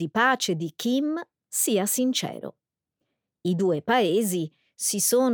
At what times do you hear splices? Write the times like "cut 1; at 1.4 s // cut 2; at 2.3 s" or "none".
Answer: none